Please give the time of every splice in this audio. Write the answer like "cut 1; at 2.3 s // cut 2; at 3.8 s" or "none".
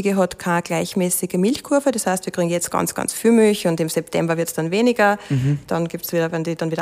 none